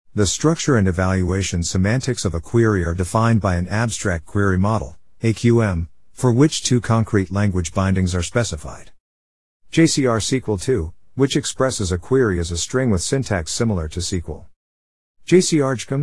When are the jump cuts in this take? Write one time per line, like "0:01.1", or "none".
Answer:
none

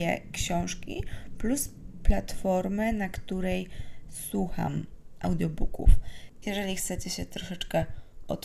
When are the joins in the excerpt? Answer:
0:06.4

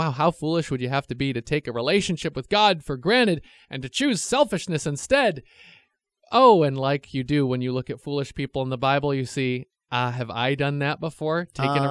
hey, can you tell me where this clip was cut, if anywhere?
none

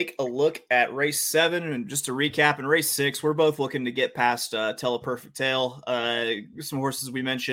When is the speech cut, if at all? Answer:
none

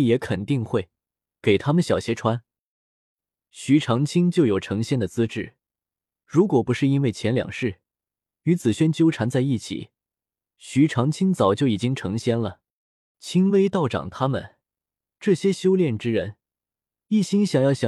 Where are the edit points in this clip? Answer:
0:03.4
0:13.1

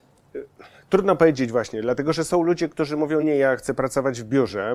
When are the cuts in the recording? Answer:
0:03.2

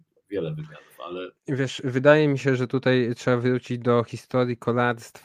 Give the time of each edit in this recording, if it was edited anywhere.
0:01.4

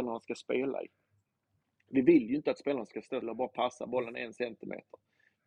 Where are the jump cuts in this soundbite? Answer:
0:03.2

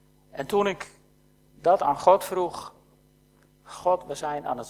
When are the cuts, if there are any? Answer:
none

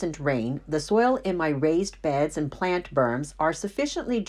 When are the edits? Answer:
none

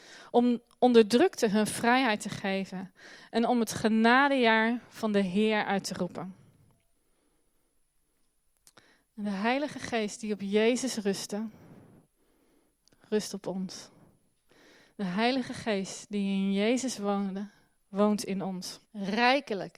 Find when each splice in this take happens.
0:18.8

